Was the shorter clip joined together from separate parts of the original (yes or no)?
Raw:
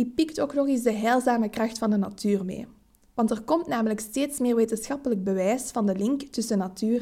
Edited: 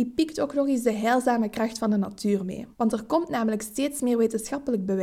yes